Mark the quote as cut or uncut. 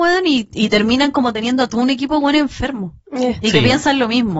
uncut